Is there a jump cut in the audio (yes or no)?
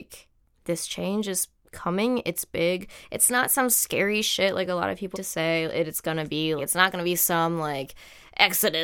yes